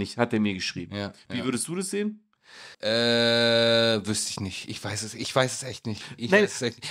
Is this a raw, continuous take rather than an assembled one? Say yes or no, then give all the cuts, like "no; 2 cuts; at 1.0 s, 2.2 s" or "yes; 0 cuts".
no; 1 cut; at 2.7 s